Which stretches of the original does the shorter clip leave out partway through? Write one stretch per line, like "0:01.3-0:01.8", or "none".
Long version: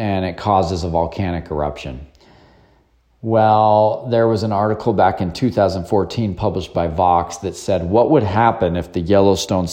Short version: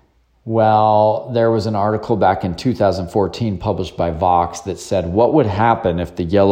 none